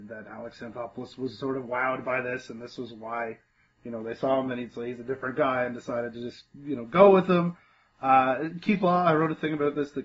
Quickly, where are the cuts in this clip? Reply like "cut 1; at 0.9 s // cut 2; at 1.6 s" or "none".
none